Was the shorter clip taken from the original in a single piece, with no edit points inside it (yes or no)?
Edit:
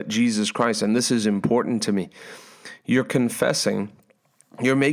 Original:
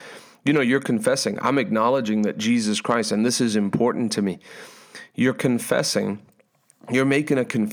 yes